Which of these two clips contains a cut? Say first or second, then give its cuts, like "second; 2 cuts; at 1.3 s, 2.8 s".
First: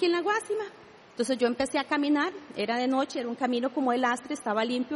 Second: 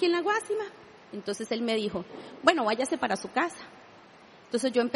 first; 1 cut; at 1.0 s